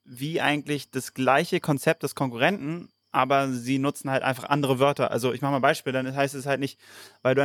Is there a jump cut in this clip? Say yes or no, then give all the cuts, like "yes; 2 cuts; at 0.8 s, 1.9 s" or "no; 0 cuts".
no; 0 cuts